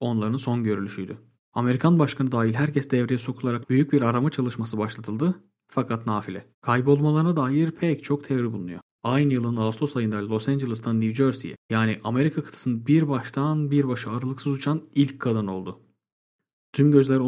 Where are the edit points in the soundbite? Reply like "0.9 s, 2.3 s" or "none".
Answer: 1.4 s, 6.5 s, 8.9 s